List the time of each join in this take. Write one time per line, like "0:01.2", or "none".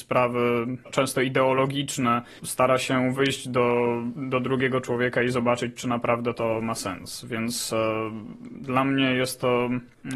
none